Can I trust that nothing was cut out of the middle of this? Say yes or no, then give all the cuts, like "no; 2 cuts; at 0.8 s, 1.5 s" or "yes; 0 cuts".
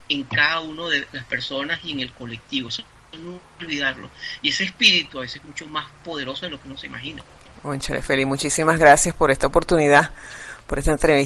yes; 0 cuts